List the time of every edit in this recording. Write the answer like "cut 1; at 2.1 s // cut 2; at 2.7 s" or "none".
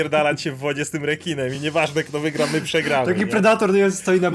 none